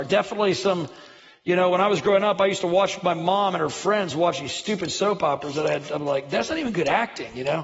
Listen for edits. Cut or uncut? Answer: uncut